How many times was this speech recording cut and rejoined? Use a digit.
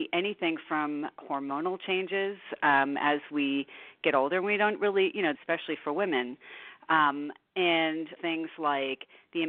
2